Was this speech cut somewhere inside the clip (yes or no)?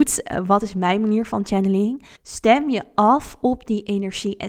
yes